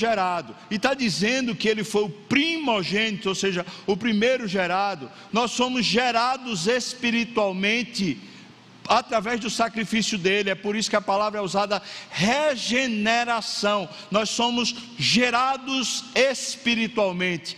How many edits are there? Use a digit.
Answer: 1